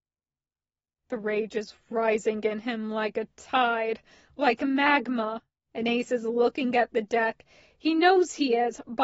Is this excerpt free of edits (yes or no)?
yes